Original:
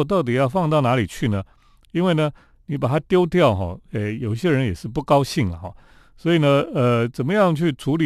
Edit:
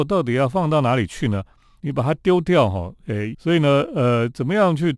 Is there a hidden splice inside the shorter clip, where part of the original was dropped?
yes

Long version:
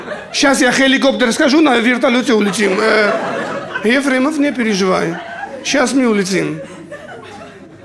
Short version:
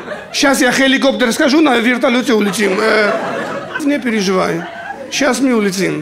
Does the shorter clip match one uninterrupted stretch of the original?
no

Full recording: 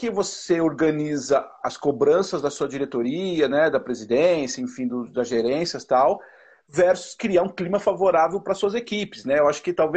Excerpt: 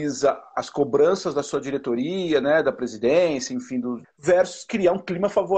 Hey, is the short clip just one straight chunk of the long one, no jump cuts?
no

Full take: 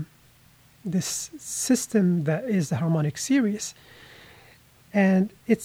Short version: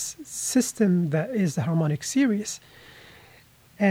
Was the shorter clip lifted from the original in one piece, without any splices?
yes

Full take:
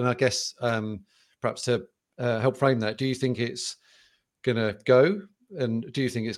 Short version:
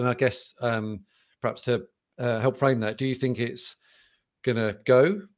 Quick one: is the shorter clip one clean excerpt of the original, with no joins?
yes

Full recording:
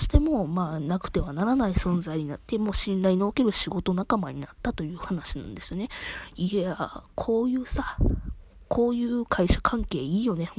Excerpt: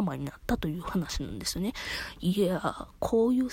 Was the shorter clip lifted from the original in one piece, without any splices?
yes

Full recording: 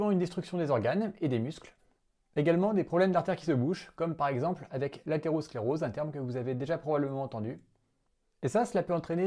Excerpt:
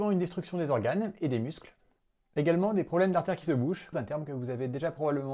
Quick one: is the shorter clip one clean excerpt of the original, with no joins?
no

